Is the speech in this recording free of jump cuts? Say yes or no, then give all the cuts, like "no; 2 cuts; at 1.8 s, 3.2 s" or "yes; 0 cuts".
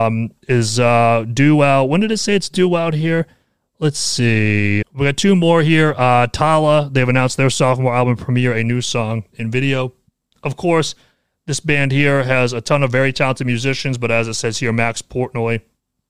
no; 1 cut; at 4.8 s